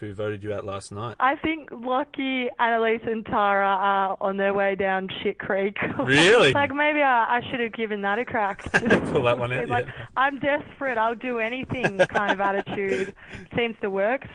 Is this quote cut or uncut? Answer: cut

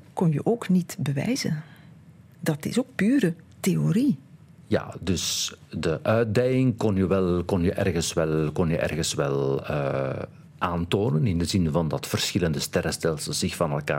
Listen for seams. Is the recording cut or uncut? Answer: uncut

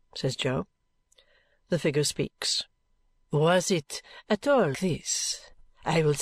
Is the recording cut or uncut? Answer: cut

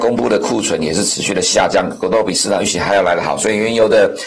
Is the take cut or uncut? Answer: uncut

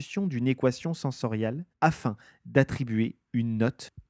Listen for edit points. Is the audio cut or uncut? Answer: cut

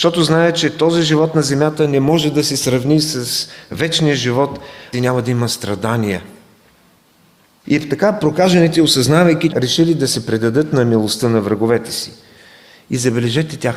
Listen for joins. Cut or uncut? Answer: cut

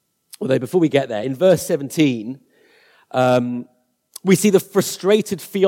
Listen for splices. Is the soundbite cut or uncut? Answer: uncut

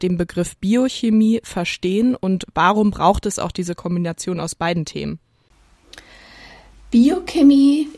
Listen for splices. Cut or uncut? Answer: uncut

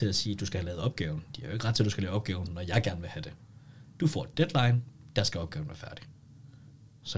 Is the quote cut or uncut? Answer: uncut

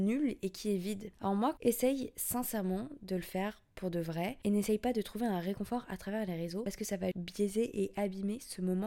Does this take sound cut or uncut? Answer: cut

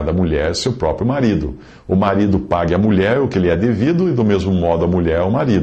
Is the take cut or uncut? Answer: uncut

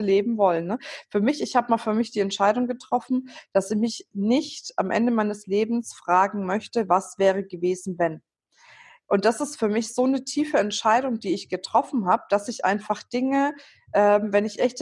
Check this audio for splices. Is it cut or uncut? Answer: uncut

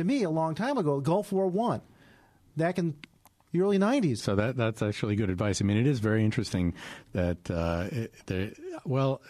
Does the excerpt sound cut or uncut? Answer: cut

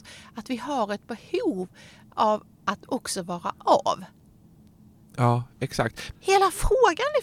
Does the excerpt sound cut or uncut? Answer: cut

